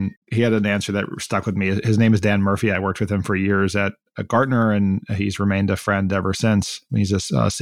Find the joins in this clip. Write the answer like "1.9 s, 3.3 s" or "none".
none